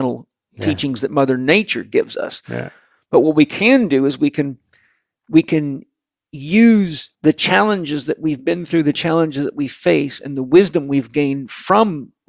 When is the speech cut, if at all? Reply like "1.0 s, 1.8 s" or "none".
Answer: 7.1 s